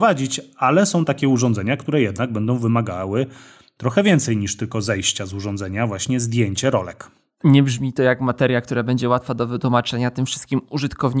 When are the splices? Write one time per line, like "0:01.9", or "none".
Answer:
none

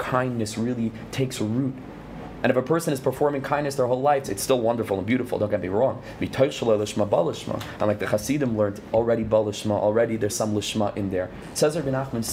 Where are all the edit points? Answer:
0:04.2
0:08.9
0:10.3

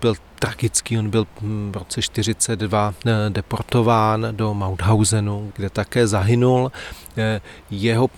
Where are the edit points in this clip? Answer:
0:05.5

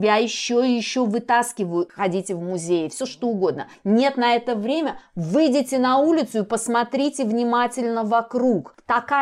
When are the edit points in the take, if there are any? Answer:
0:01.9

